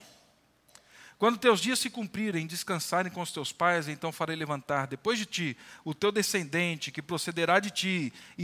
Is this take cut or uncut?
uncut